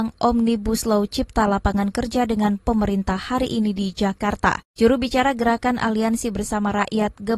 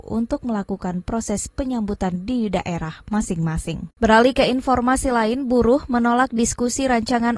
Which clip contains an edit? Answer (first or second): second